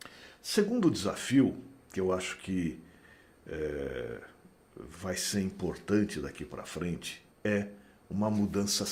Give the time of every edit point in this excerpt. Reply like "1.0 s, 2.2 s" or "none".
7.3 s